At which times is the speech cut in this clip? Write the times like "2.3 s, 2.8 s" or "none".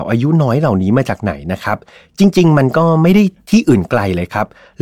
none